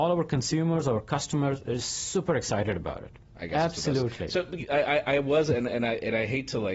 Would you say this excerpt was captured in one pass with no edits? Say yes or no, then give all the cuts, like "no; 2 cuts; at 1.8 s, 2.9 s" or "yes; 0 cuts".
no; 1 cut; at 3.2 s